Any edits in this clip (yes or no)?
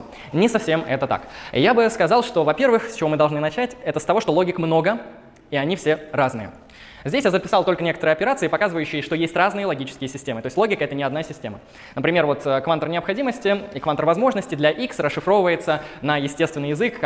no